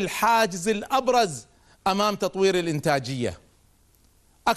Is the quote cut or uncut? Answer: uncut